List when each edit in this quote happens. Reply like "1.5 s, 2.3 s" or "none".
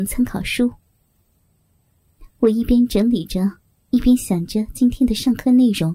none